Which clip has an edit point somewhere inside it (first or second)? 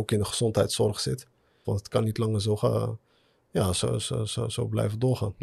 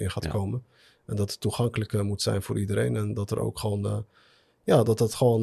first